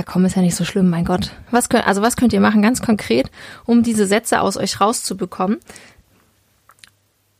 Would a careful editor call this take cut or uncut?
cut